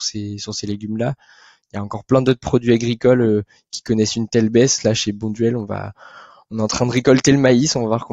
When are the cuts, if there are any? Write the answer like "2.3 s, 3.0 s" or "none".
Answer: none

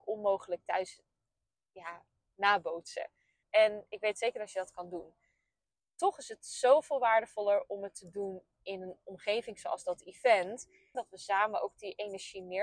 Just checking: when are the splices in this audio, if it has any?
3.4 s, 10.9 s

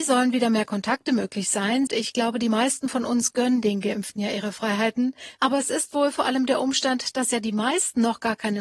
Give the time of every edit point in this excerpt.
1.9 s, 5.4 s

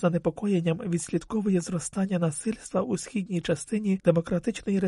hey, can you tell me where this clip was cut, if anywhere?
none

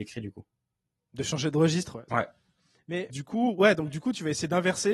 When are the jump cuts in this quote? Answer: 2.1 s, 3.1 s

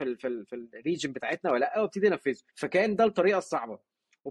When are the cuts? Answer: 2.5 s

